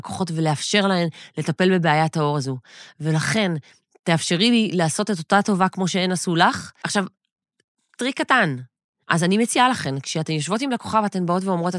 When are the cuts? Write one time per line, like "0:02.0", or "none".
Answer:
0:06.8
0:09.0

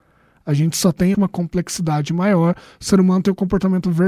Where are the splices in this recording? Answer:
0:01.1

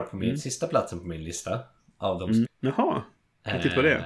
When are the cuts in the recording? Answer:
0:02.4

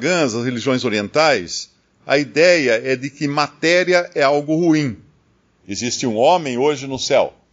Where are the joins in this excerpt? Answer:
0:05.6

